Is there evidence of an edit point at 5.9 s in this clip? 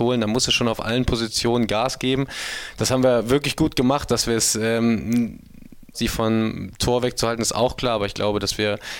yes; 1 cut; at 5.9 s

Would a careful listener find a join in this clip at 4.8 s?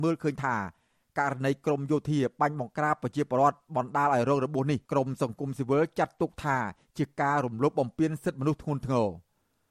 yes; 1 cut; at 4.8 s

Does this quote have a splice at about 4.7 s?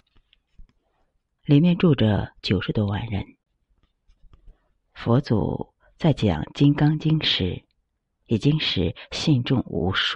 no; 1 cut; at 1.4 s

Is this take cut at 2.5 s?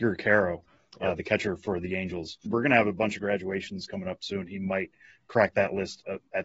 yes; 1 cut; at 2.5 s

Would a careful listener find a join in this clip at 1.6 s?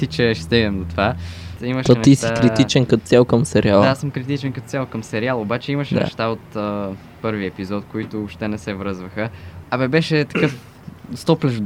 yes; 2 cuts; at 1.6 s, 9.6 s

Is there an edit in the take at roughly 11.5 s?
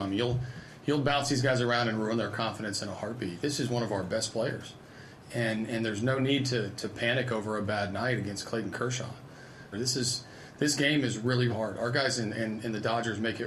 yes; 2 cuts; at 9.7 s, 11.5 s

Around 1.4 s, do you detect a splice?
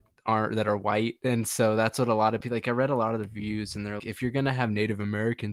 no; 1 cut; at 4.0 s

